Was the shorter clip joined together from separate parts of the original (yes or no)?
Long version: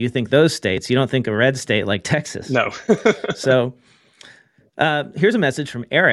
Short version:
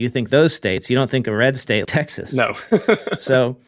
yes